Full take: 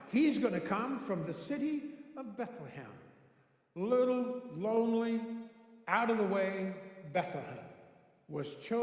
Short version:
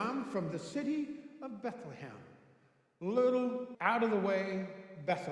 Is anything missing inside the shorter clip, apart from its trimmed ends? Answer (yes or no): yes